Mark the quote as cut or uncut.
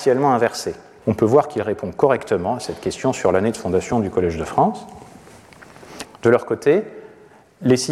cut